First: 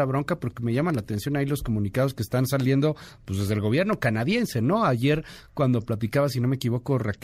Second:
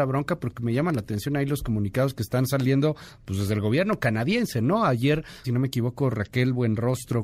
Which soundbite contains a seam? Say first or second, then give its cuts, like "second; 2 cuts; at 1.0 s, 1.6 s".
second; 1 cut; at 5.4 s